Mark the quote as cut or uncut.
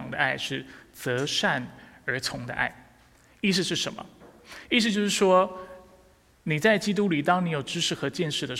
uncut